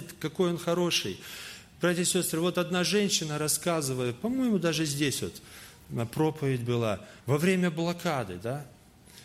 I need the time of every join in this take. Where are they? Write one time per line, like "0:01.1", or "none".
0:07.2